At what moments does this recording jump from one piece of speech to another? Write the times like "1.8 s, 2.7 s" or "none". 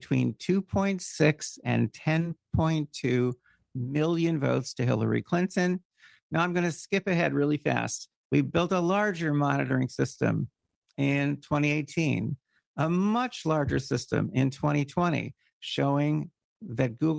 none